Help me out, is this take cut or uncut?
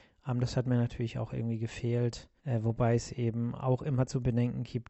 cut